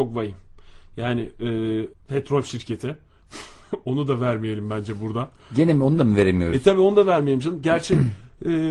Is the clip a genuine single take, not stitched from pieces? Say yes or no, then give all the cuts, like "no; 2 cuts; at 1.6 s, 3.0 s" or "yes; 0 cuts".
no; 1 cut; at 1.9 s